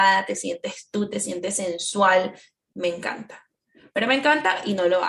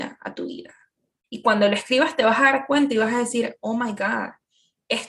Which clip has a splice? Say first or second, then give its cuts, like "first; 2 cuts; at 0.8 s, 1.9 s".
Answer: second; 1 cut; at 1.2 s